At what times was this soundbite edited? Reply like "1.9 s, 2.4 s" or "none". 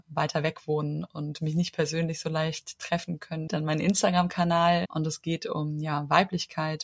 3.5 s, 4.9 s